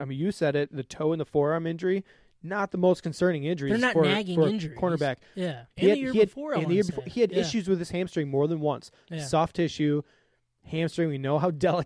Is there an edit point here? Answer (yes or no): yes